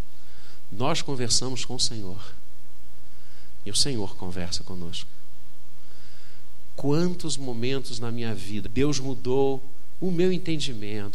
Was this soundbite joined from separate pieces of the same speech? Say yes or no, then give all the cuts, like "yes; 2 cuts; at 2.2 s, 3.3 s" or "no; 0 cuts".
yes; 1 cut; at 8.7 s